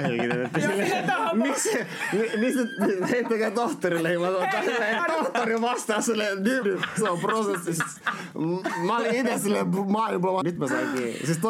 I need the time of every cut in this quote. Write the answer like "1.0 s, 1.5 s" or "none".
5.0 s, 6.6 s, 10.4 s